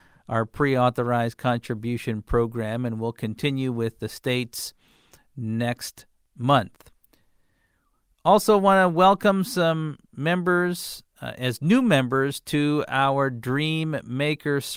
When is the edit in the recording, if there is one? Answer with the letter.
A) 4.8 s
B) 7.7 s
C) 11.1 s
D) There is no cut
D